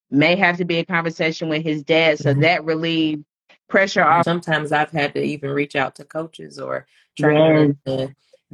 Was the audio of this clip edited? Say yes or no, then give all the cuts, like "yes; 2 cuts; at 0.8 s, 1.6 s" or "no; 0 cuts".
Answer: yes; 1 cut; at 4.2 s